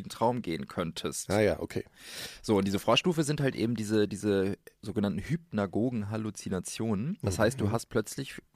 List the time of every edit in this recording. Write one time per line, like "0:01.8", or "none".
none